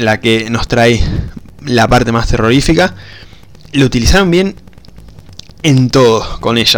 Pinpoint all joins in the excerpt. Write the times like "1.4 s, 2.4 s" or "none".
none